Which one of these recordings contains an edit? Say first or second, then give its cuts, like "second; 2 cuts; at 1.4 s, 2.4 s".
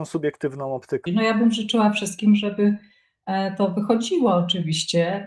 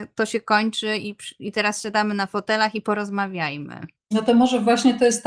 first; 1 cut; at 1.1 s